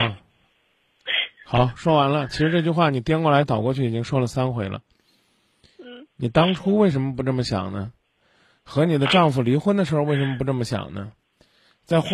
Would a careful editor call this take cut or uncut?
uncut